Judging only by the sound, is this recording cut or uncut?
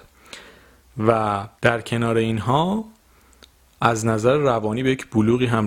cut